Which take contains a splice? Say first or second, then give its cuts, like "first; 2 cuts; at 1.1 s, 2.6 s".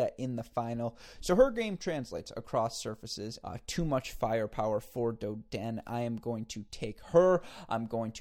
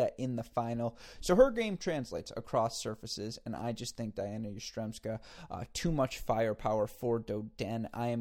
first; 1 cut; at 3.4 s